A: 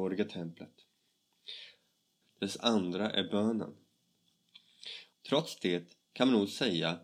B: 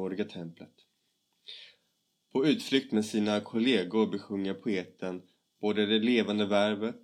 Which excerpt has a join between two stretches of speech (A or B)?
A